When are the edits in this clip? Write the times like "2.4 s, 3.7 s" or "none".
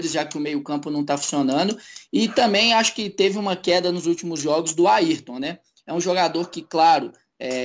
none